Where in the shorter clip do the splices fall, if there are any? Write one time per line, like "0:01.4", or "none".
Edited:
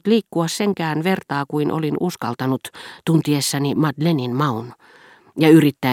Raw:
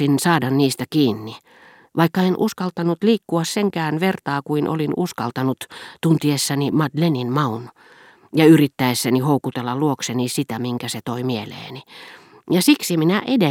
none

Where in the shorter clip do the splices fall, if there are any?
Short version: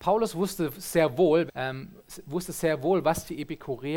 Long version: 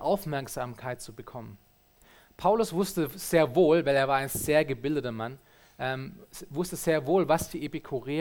0:01.5

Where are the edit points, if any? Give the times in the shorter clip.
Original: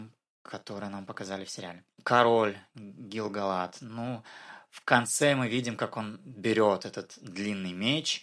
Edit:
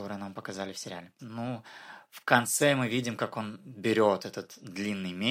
0:01.2

